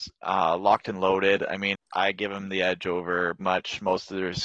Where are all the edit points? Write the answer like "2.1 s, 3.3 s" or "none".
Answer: 1.7 s, 3.4 s